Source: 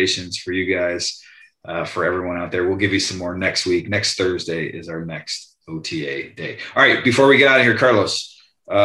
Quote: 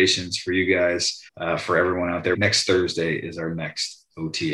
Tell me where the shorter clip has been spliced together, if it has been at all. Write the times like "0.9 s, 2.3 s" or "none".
1.3 s, 2.3 s